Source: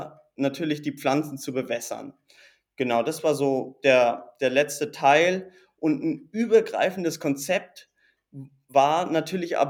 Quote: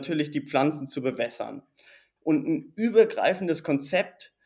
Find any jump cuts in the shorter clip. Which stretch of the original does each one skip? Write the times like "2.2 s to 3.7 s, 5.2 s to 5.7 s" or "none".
2.7 s to 5.7 s